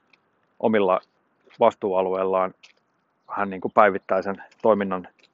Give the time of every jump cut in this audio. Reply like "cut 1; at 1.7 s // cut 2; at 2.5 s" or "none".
none